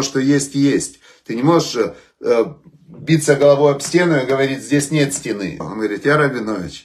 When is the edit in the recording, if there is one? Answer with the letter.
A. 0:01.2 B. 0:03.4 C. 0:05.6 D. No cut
C